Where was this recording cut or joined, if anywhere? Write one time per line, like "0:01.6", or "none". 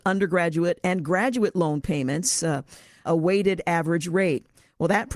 0:03.0